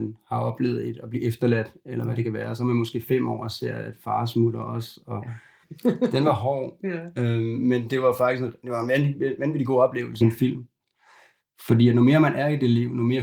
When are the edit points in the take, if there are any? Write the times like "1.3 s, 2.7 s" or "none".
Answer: 5.6 s, 10.2 s